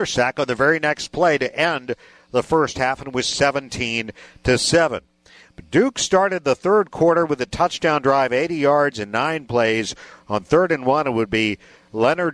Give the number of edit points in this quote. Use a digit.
0